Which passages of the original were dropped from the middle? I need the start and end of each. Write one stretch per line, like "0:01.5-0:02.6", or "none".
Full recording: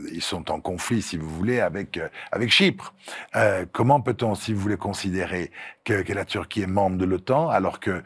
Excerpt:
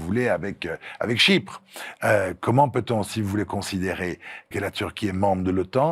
0:05.8-0:06.0